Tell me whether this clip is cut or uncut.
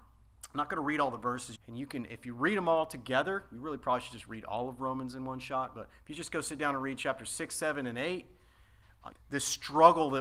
cut